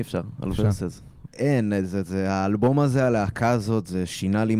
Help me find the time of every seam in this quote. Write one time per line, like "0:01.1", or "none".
0:01.3